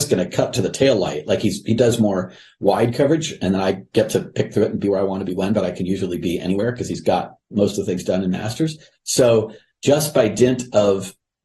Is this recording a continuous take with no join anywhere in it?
yes; 0 cuts

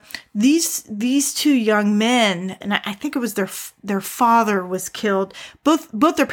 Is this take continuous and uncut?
no; 1 cut; at 2.6 s

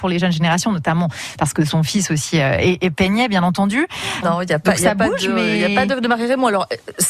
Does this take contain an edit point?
yes; 1 cut; at 4.2 s

